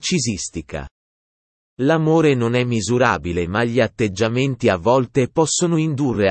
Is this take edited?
no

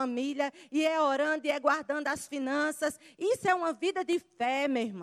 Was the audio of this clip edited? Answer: no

